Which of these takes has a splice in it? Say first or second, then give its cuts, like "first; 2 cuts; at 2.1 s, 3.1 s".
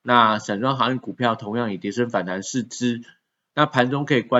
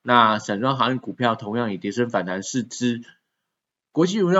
first; 1 cut; at 3.5 s